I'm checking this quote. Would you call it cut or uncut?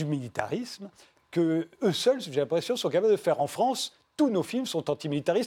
uncut